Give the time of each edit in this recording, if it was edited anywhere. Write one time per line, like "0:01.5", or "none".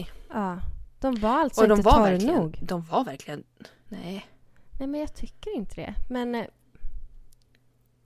0:03.9